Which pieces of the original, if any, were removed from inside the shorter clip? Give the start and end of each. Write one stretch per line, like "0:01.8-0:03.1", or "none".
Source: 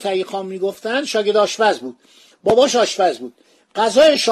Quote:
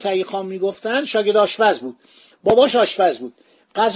none